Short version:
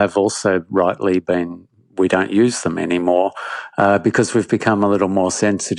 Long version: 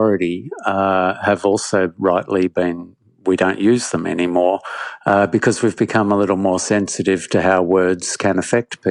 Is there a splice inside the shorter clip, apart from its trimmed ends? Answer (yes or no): no